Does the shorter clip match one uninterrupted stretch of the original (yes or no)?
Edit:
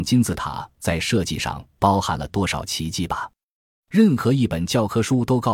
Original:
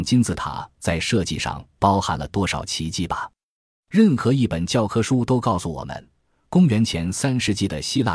yes